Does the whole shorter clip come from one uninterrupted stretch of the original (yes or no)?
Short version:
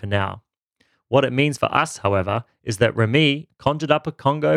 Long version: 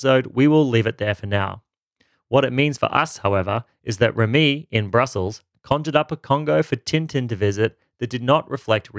no